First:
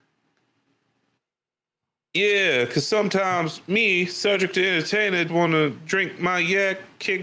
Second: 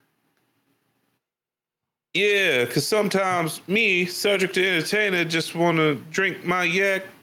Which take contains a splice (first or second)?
first